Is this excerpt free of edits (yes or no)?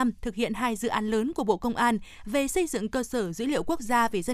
yes